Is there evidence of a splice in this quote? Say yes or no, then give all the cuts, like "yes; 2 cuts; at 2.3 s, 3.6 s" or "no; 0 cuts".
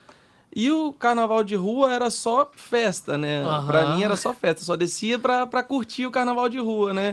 no; 0 cuts